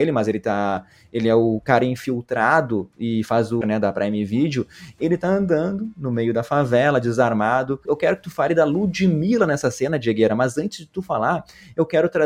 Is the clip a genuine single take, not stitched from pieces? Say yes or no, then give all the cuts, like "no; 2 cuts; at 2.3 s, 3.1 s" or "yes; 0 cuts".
no; 2 cuts; at 3.6 s, 7.8 s